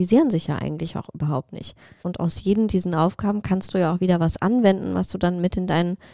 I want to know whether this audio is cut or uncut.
cut